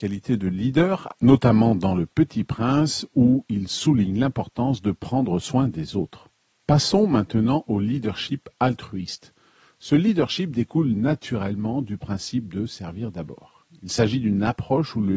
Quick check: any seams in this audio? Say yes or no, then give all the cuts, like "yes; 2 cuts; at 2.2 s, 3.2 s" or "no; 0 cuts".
yes; 1 cut; at 1.1 s